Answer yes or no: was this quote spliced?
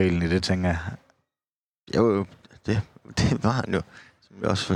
no